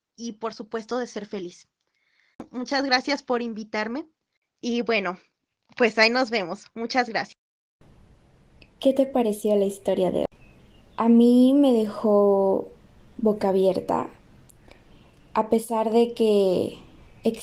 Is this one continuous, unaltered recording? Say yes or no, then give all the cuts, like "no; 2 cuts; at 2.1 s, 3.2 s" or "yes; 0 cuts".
yes; 0 cuts